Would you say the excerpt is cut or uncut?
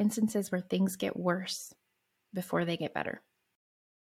uncut